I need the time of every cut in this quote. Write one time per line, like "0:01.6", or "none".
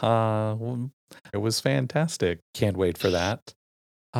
0:01.3
0:02.4